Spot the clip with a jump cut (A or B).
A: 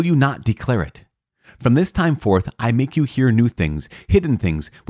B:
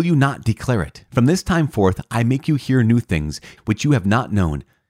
B